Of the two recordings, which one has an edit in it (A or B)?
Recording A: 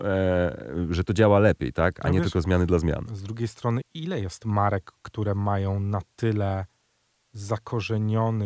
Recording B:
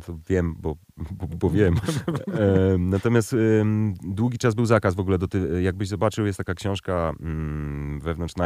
A